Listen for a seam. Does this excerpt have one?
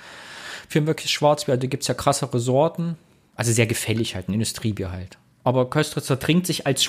no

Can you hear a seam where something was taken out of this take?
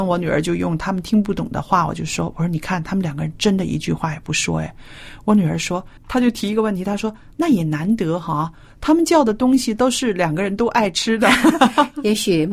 yes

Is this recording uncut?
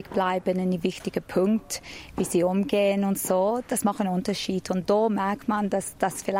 yes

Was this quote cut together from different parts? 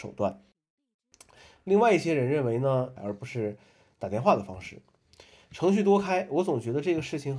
yes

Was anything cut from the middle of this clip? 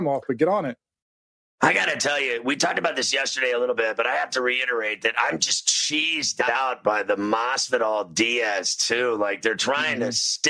no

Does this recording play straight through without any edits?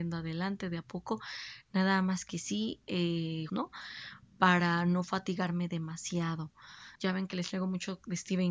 no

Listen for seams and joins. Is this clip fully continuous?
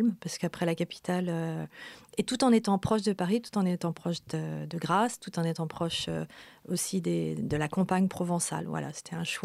yes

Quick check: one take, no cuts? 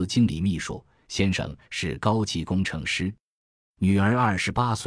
yes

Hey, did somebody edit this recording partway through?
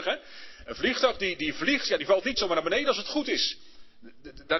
no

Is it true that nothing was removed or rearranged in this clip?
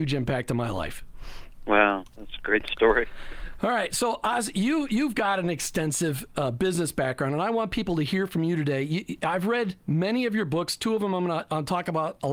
yes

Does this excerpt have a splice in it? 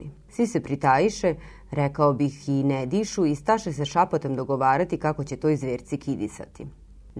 no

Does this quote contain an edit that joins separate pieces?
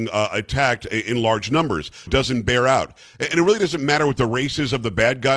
yes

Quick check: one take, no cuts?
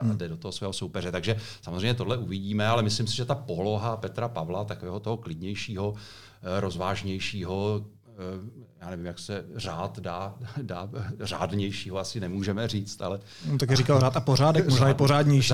yes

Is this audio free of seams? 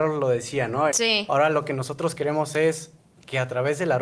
no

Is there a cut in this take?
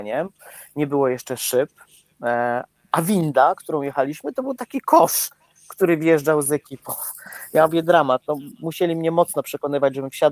no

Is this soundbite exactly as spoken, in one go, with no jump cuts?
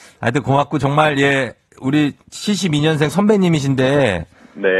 yes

